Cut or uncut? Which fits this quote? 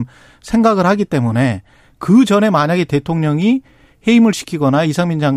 uncut